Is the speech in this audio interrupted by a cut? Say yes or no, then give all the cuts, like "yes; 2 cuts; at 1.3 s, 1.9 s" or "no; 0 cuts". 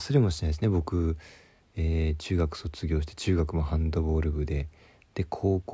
no; 0 cuts